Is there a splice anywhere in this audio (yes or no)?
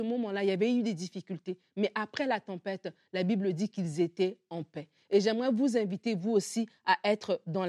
no